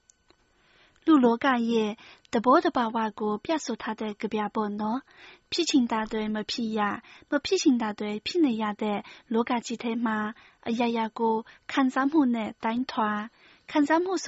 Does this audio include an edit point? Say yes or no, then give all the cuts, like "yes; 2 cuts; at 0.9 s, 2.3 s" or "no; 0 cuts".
no; 0 cuts